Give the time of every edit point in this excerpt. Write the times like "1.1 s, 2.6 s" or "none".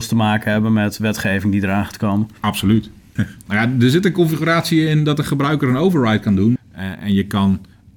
3.2 s, 6.6 s